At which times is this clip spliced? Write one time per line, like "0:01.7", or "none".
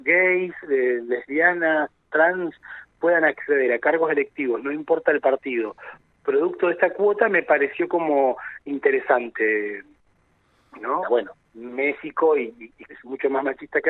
0:11.0
0:12.8